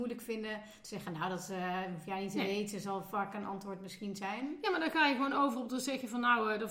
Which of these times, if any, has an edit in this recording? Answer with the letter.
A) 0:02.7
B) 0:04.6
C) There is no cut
C